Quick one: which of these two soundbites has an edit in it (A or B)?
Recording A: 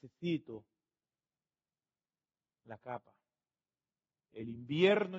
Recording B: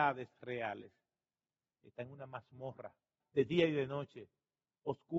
B